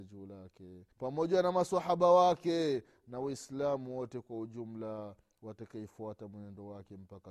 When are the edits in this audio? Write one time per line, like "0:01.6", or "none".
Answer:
0:00.9